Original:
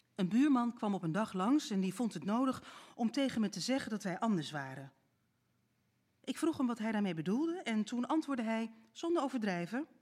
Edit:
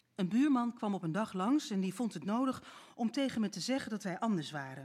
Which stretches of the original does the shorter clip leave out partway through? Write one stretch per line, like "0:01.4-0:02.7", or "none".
none

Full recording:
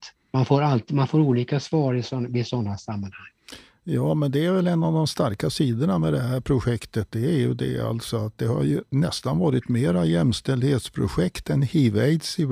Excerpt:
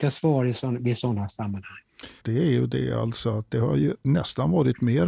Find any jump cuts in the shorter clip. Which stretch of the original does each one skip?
0:03.7-0:07.1

